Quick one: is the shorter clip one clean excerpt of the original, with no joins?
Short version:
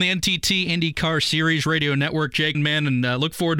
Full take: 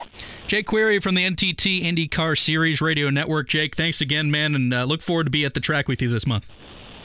no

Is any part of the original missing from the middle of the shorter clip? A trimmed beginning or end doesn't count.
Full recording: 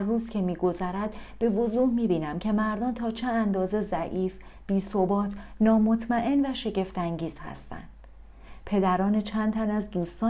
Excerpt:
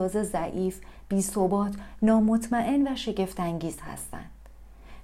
no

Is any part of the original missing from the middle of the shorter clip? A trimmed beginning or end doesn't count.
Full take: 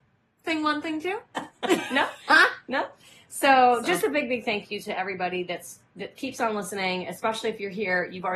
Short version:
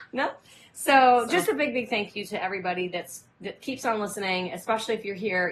no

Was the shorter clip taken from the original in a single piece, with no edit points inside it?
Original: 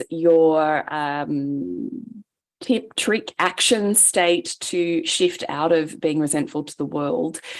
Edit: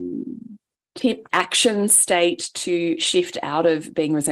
no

